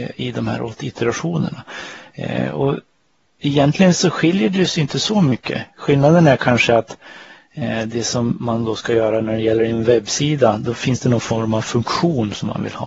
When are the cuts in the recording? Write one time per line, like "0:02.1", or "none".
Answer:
none

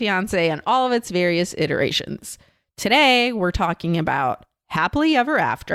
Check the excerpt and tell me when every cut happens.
none

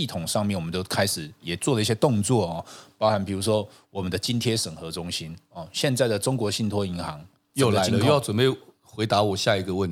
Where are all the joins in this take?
0:01.4

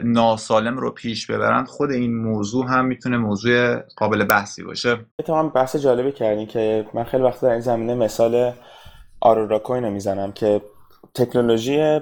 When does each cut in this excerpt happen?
0:05.1

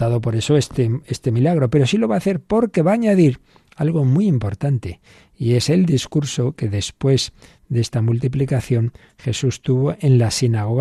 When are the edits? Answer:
none

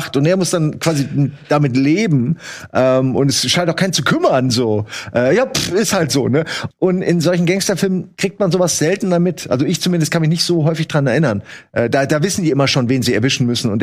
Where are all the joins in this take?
0:06.7

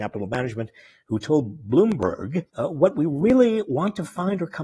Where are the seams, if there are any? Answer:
0:02.5

